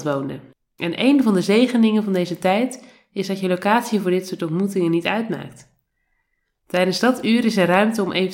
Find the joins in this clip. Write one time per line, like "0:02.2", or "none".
none